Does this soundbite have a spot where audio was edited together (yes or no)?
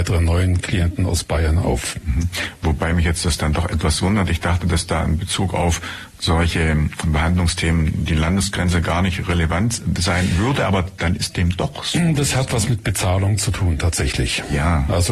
no